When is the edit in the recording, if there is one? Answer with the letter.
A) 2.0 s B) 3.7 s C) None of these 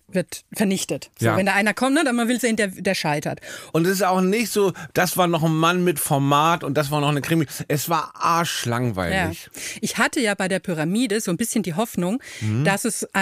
B